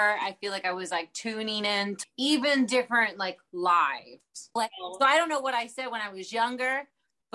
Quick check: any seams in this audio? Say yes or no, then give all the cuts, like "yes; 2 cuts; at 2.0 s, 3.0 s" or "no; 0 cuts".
yes; 2 cuts; at 2.0 s, 4.6 s